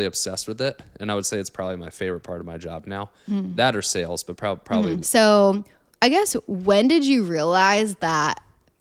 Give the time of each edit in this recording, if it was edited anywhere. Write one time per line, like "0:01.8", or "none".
0:05.0